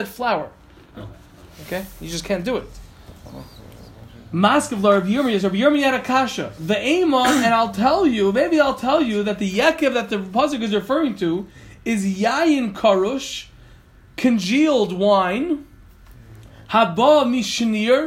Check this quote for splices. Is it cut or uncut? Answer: uncut